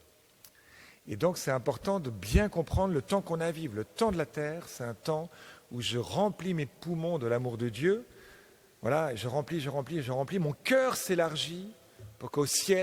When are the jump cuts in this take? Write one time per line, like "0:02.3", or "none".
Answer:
none